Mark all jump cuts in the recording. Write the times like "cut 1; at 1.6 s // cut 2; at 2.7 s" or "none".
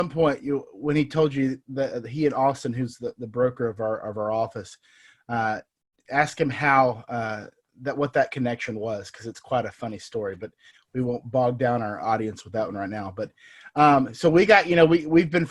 none